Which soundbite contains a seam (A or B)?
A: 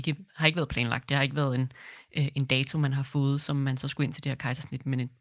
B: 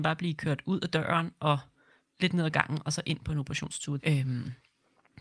B